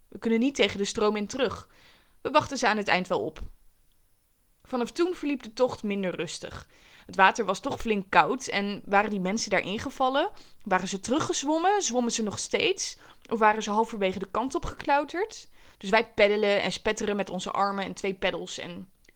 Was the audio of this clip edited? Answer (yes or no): yes